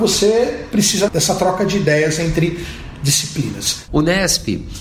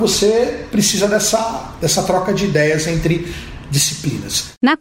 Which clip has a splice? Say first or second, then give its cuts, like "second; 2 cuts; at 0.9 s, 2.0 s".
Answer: first; 2 cuts; at 1.1 s, 3.9 s